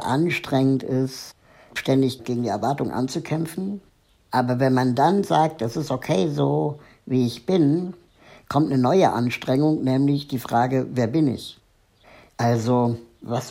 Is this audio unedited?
yes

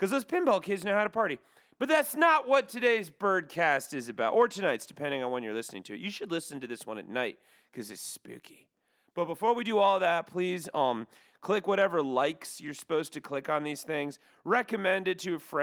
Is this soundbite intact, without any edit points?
yes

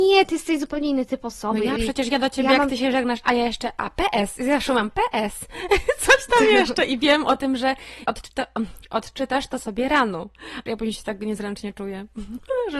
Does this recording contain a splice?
yes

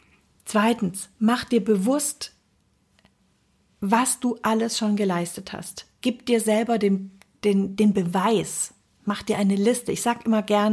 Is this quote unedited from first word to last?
no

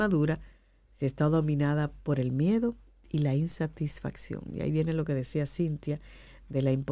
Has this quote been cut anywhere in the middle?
no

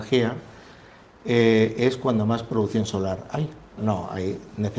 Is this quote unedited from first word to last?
no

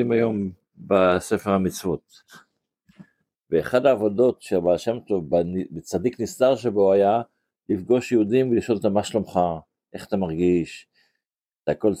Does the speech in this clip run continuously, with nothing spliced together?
no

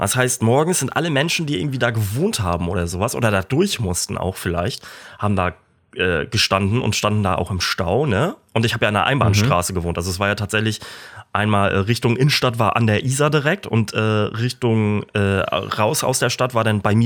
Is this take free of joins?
yes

